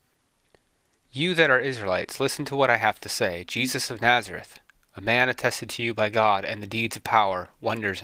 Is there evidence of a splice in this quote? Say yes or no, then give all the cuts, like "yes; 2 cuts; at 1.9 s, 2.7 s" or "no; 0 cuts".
no; 0 cuts